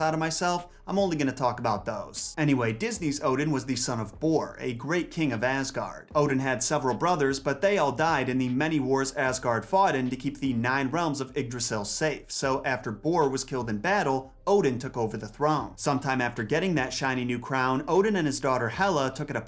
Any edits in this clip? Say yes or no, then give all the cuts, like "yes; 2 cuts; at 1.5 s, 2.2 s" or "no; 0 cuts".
no; 0 cuts